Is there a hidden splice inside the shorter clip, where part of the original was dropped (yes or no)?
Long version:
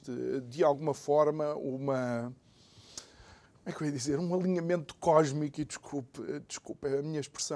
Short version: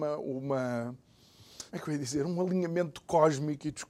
yes